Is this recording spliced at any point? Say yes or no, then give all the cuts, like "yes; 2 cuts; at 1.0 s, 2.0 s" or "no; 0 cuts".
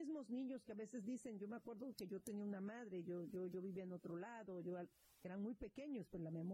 no; 0 cuts